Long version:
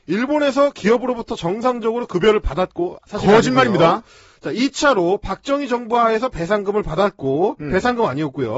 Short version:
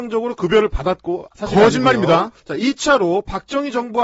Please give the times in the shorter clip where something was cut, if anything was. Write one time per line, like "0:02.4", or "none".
0:02.4